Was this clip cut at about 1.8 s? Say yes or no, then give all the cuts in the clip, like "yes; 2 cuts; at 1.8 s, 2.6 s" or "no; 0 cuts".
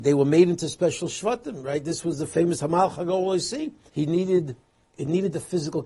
no; 1 cut; at 3.9 s